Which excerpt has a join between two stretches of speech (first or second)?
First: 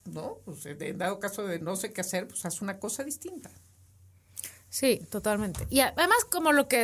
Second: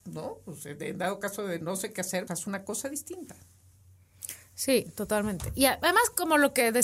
second